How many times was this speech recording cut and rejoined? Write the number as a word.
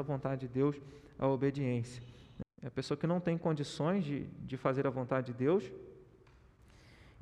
one